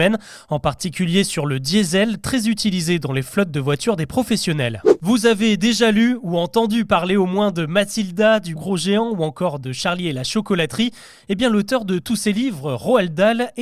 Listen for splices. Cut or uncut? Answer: cut